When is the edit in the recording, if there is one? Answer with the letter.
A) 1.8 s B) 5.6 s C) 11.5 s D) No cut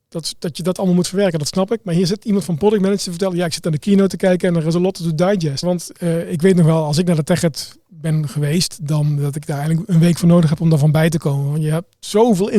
B